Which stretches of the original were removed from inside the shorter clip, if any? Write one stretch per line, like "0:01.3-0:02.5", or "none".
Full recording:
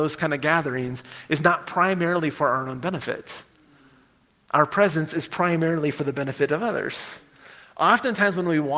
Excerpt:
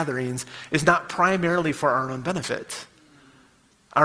none